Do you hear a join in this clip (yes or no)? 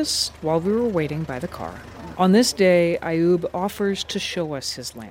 yes